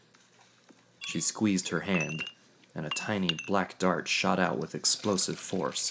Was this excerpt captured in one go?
no; 1 cut; at 1.0 s

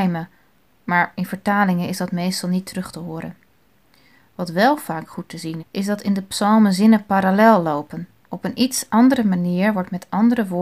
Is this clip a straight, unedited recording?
no; 2 cuts; at 5.6 s, 8.2 s

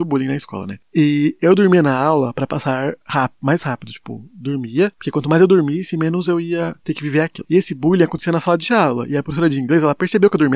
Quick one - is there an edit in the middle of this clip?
no; 0 cuts

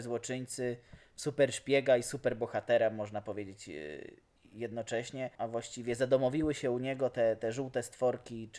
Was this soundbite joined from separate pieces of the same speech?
yes; 1 cut; at 5.4 s

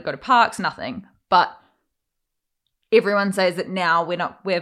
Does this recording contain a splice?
no; 0 cuts

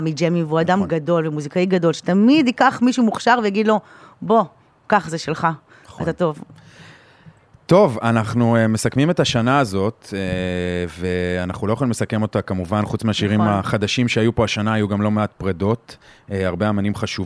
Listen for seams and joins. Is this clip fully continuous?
yes; 0 cuts

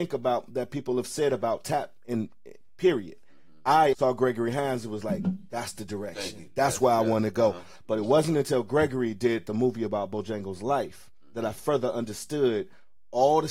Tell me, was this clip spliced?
yes; 1 cut; at 3.9 s

